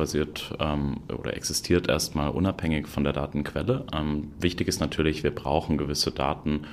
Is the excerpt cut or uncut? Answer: uncut